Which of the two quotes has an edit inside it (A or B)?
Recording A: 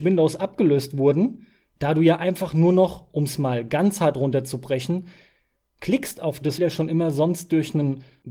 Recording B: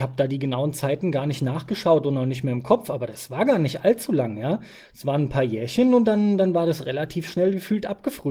A